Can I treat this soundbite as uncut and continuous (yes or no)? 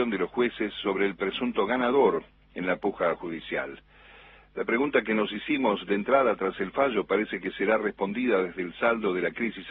yes